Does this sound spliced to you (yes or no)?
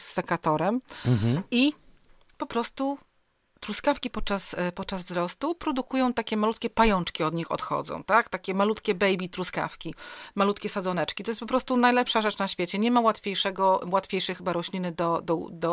no